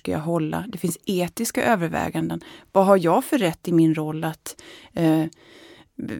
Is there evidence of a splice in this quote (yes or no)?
no